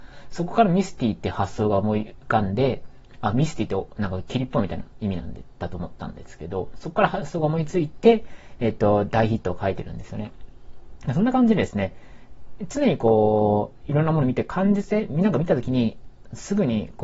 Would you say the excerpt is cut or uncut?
uncut